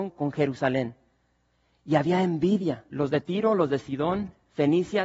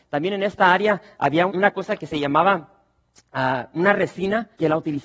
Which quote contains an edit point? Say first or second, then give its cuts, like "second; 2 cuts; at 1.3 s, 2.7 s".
second; 1 cut; at 1.5 s